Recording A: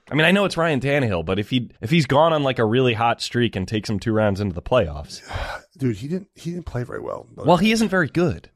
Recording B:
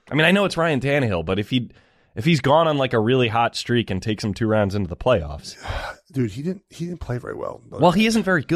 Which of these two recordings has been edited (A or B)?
A